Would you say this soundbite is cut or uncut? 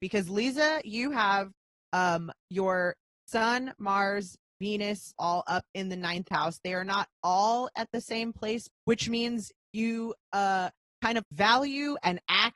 cut